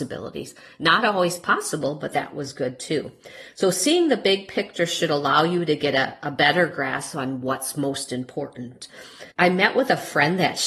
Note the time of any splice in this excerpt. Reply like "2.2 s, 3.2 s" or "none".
9.3 s